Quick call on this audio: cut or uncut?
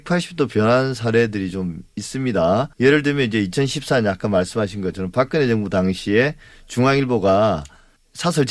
cut